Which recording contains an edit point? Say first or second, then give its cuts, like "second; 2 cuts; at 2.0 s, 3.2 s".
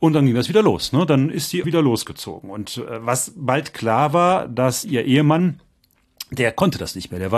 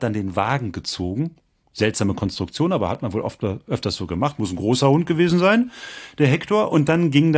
first; 1 cut; at 1.6 s